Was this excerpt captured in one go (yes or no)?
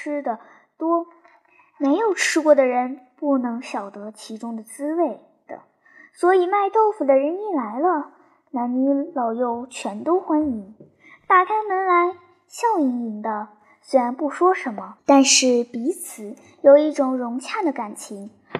yes